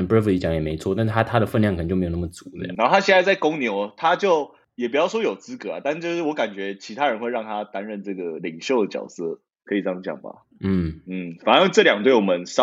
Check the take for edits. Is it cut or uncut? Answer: cut